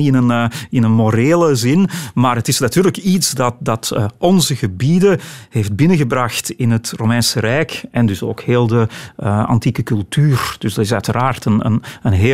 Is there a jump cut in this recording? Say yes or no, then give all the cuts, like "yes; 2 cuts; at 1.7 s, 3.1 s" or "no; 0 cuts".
no; 0 cuts